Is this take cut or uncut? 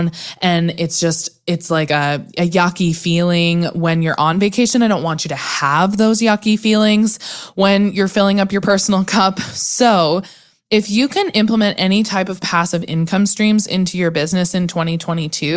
uncut